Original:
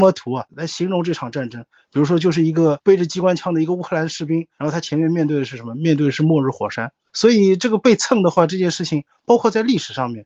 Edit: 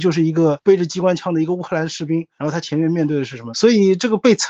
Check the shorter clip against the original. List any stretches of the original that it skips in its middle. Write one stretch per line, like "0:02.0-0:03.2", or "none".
0:05.7-0:07.1